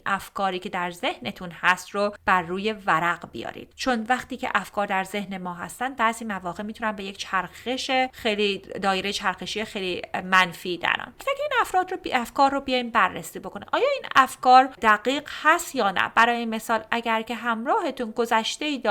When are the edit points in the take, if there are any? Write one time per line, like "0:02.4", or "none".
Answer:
0:11.2

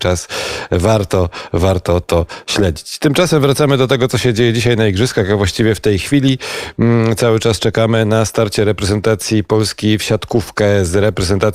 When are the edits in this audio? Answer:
none

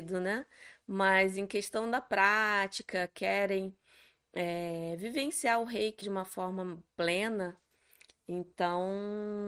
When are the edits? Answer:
0:06.0

